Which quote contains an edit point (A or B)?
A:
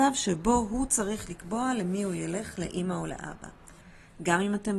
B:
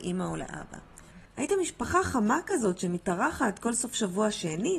B